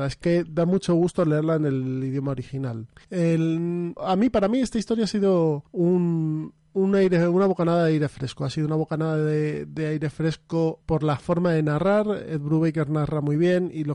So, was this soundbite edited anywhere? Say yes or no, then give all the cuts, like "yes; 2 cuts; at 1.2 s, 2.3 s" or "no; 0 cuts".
yes; 1 cut; at 4.0 s